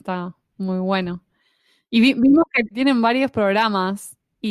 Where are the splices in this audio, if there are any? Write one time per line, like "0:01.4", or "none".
none